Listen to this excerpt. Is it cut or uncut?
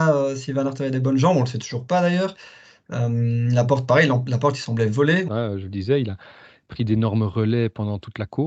cut